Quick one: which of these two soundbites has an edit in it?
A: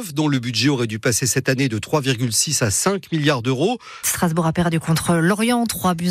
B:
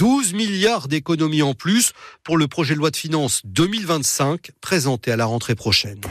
A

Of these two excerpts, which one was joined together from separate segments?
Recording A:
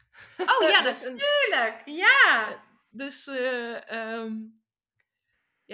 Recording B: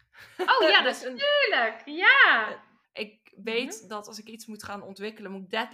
B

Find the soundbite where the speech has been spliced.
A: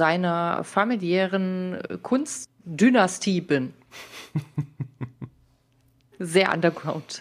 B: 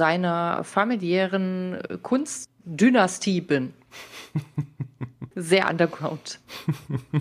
B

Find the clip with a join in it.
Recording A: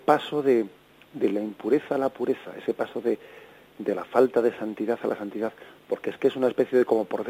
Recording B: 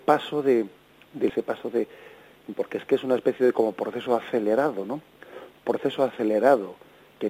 B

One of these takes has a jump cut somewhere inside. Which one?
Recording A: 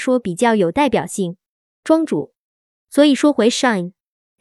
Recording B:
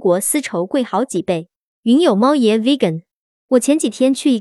B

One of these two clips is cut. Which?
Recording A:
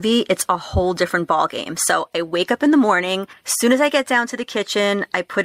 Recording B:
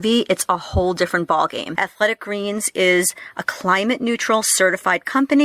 B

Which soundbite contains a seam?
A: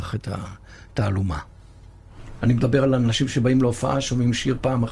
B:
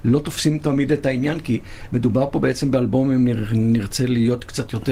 A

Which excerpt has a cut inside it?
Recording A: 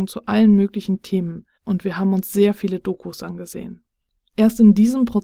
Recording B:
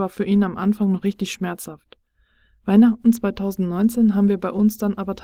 A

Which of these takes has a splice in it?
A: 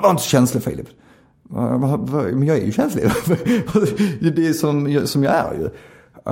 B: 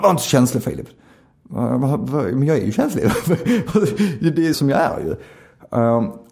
B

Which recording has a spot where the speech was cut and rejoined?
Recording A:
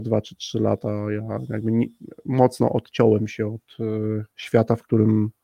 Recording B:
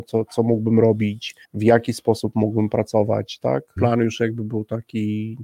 B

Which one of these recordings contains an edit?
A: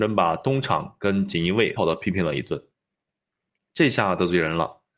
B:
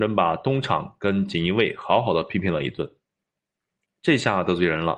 A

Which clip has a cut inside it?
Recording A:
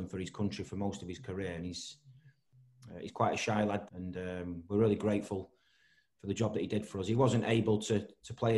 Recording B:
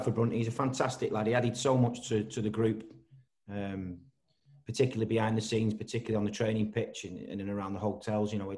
A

